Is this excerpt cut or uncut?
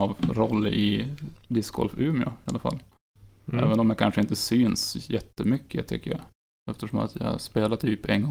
uncut